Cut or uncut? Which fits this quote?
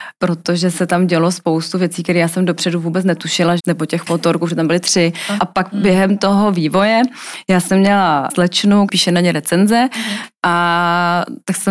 cut